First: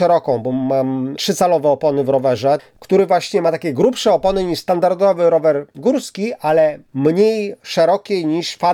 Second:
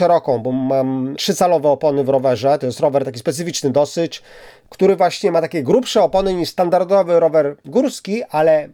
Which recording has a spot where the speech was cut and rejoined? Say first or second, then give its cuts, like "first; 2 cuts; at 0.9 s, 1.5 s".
first; 1 cut; at 2.6 s